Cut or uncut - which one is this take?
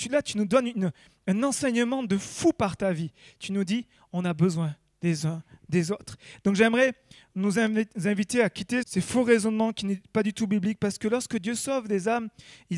cut